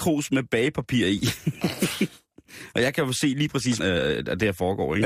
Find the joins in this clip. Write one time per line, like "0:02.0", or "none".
0:03.8